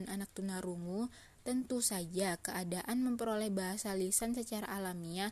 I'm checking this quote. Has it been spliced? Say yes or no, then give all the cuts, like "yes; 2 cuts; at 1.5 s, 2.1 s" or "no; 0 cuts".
no; 0 cuts